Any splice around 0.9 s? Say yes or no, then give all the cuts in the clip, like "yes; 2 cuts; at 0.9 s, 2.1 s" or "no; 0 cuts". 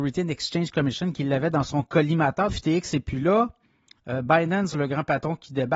no; 2 cuts; at 2.5 s, 4.7 s